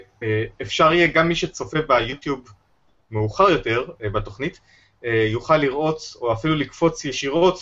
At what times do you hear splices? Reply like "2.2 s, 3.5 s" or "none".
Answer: none